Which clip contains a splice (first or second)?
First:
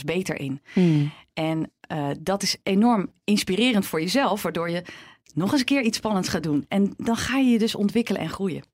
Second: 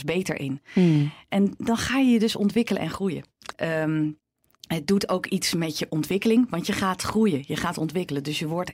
second